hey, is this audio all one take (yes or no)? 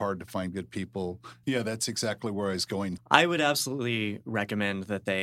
no